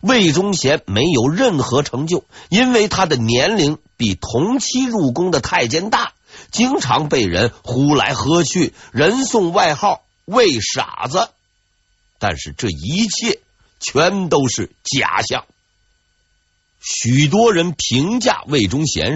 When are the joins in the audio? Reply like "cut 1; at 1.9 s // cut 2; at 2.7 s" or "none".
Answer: cut 1; at 2.5 s